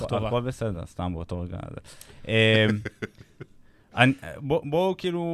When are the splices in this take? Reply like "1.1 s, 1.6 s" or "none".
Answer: none